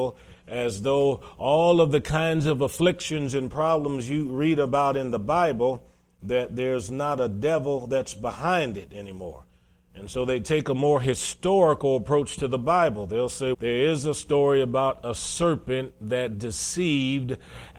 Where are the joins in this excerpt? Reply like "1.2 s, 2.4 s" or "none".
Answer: 13.5 s